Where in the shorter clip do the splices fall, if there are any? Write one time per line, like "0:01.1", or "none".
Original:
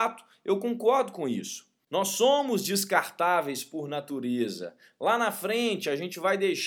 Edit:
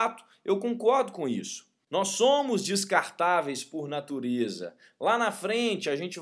none